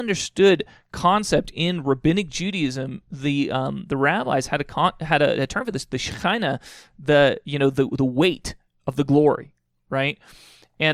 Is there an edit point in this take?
no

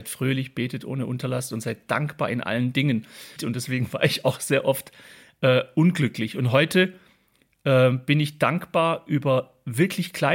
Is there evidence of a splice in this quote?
yes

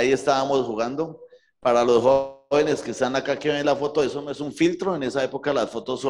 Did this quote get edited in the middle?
no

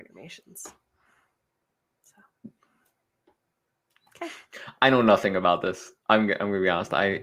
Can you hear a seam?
no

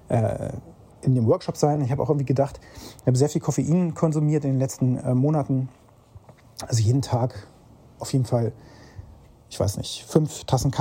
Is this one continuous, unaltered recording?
yes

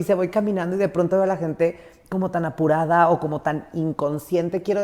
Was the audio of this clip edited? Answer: no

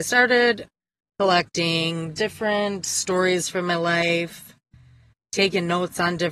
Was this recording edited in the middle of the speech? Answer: no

